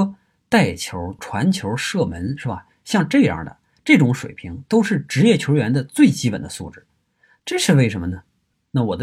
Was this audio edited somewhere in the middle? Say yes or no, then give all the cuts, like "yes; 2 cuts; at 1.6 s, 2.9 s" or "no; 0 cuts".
yes; 2 cuts; at 1.2 s, 7.4 s